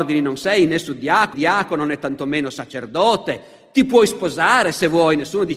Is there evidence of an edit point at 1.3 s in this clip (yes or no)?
yes